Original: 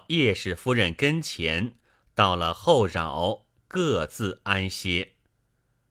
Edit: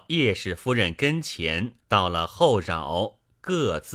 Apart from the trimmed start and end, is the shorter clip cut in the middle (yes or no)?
yes